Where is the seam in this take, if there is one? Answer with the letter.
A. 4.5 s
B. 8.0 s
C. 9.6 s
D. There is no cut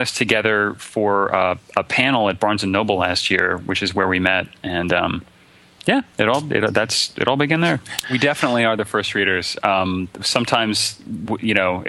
B